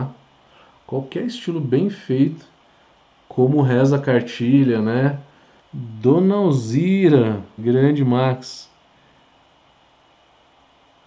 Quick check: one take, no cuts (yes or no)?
no